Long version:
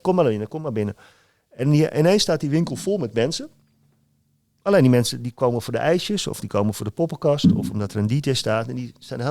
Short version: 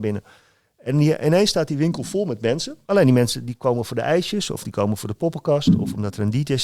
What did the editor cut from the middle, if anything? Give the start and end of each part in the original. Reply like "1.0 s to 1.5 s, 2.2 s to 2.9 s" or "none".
3.6 s to 4.6 s